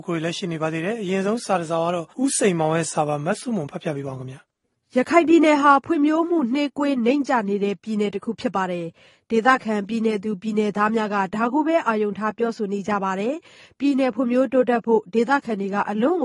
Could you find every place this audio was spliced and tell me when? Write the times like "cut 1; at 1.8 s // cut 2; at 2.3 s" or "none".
cut 1; at 2.1 s